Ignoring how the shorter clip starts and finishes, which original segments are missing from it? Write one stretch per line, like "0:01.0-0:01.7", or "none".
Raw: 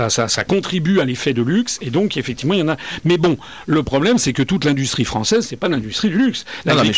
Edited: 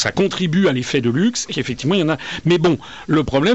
0:01.8-0:02.1